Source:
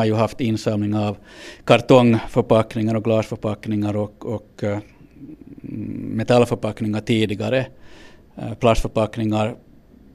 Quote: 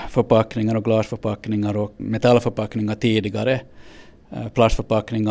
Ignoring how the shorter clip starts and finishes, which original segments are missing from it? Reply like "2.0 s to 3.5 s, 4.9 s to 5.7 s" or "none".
4.2 s to 6.1 s